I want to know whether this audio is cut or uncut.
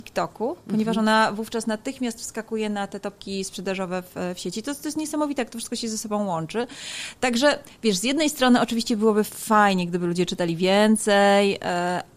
uncut